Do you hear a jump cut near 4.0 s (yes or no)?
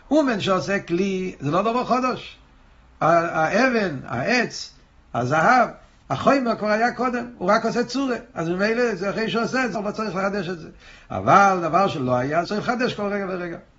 no